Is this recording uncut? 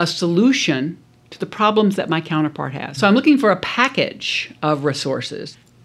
no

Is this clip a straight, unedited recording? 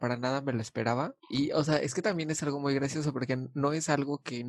yes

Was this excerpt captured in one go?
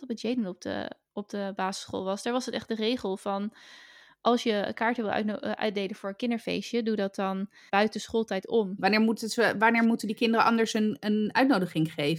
no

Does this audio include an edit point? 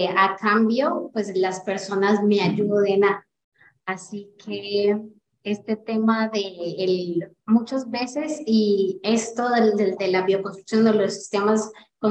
yes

